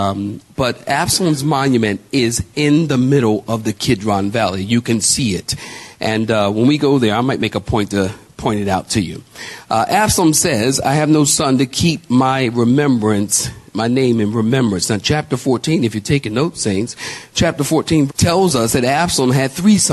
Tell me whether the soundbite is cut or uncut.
cut